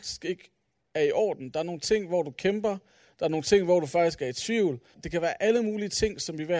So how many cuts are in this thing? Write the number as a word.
one